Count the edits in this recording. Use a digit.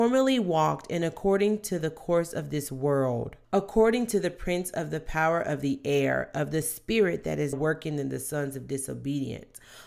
2